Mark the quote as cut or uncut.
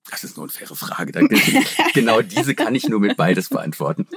uncut